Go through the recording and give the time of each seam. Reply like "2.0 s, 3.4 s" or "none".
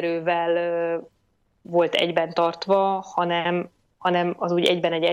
none